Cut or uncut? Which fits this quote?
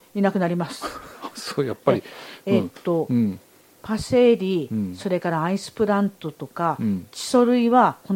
uncut